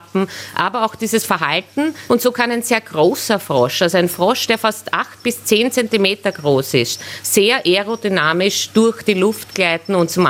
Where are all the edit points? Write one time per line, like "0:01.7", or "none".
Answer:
none